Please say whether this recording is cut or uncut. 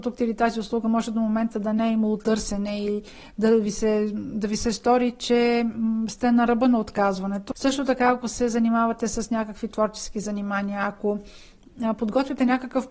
cut